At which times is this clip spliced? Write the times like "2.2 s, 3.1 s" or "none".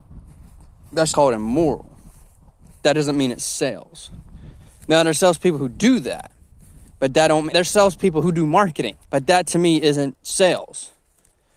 1.1 s, 7.5 s, 9.0 s